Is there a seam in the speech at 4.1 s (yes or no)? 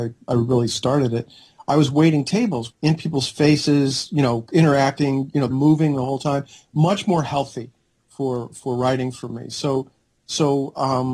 no